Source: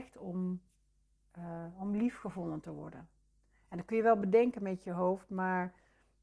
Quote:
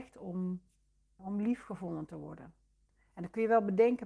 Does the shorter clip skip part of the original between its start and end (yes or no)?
yes